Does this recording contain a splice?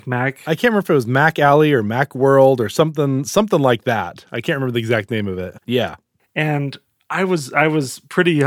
yes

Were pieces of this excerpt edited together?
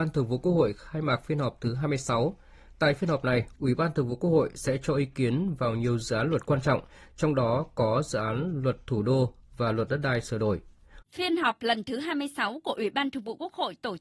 yes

